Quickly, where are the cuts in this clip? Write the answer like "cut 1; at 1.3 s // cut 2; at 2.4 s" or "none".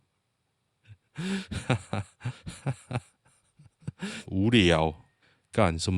cut 1; at 1.1 s // cut 2; at 4.3 s